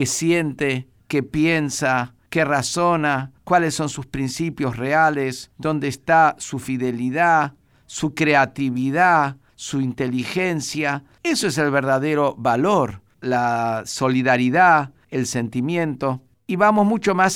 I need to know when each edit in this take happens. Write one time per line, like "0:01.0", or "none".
none